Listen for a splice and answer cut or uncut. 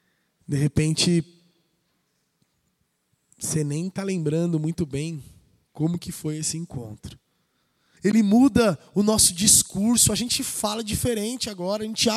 cut